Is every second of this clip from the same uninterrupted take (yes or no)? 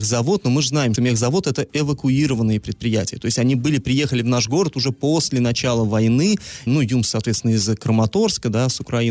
no